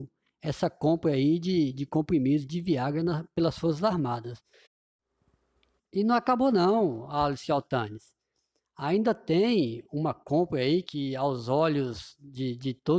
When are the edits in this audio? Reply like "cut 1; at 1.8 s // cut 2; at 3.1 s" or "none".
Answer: cut 1; at 10.8 s